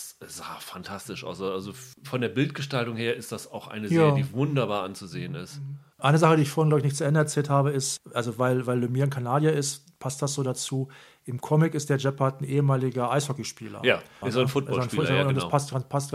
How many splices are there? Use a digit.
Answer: 1